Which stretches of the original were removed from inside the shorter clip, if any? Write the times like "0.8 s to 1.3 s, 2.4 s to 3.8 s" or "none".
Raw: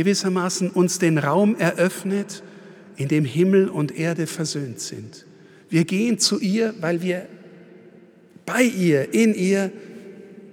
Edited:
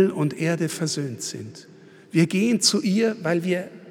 none